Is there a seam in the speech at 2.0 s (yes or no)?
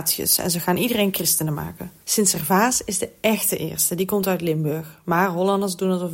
yes